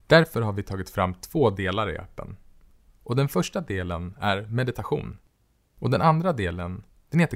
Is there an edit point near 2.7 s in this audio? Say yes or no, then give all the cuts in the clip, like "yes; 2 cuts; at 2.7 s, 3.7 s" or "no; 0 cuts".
no; 1 cut; at 5.6 s